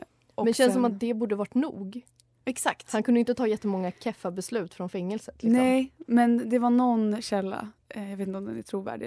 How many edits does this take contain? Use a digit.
0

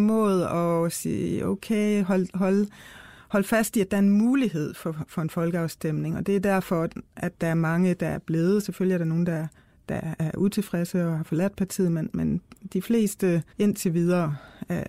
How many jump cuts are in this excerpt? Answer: 1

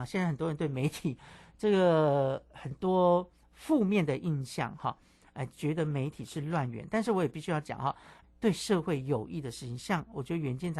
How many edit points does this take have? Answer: 1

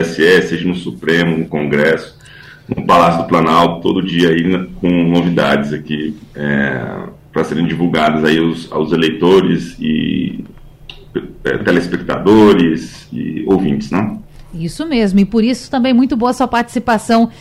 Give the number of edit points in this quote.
0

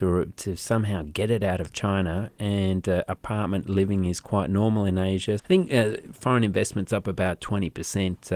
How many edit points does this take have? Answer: 1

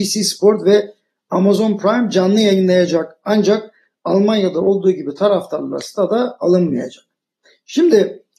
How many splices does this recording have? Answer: 0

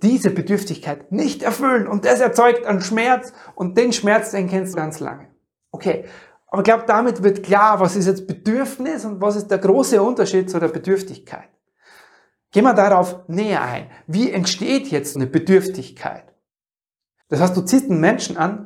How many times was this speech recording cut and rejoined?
3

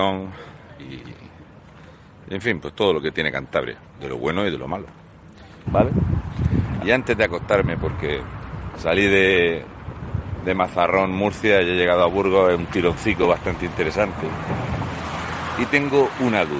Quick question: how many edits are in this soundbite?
2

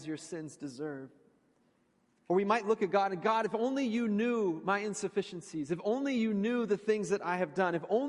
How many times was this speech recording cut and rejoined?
1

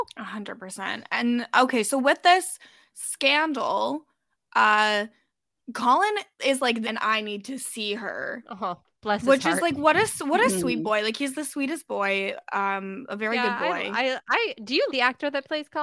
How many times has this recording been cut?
2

